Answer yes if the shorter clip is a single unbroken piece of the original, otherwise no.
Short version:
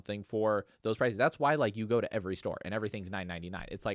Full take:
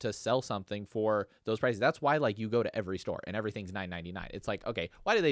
yes